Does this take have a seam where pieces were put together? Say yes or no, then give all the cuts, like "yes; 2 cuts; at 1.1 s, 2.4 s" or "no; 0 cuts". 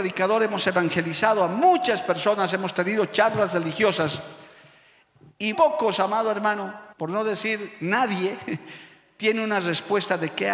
yes; 2 cuts; at 5.5 s, 6.9 s